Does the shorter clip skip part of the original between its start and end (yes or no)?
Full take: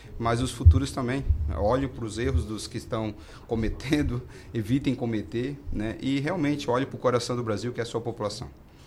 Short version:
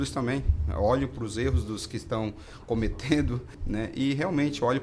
yes